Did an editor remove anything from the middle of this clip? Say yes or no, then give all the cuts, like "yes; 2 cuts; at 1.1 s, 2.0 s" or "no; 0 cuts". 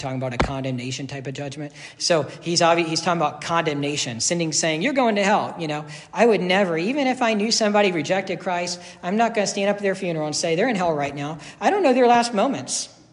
yes; 1 cut; at 2.0 s